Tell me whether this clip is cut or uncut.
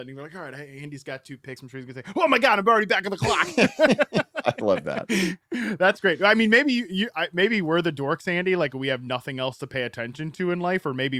uncut